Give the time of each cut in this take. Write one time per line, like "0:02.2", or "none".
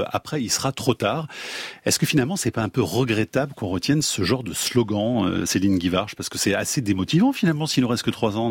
none